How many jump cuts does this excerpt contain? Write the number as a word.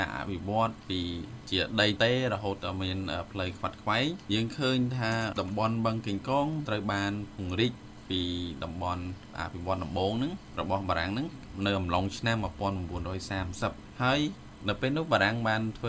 one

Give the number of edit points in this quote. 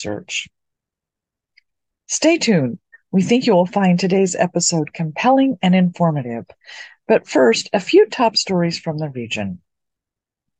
zero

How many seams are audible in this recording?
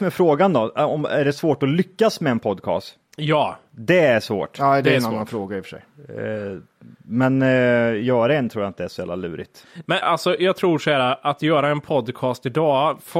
one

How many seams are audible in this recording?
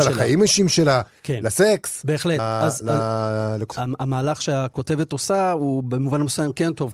two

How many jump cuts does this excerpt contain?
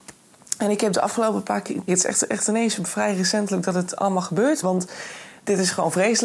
two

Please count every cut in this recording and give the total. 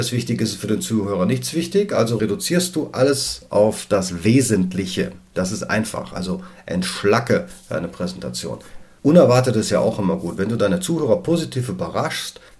zero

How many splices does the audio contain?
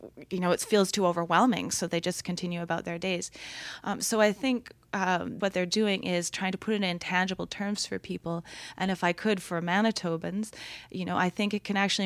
one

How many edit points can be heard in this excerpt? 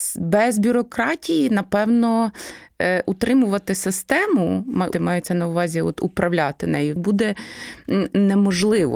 two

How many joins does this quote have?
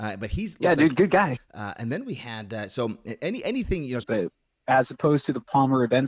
two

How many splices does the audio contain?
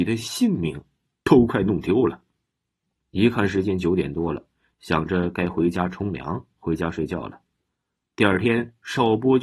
two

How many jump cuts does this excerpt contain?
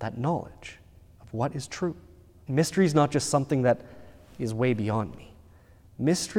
one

